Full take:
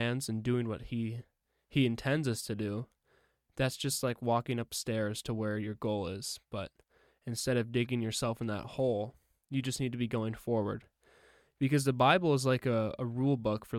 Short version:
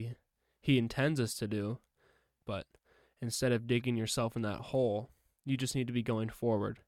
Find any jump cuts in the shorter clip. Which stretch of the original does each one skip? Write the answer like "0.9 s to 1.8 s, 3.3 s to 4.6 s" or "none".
3.5 s to 6.5 s